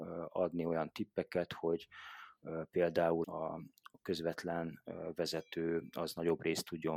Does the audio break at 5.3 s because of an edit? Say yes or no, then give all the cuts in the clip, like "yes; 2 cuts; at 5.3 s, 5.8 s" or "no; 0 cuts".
no; 2 cuts; at 1.5 s, 3.2 s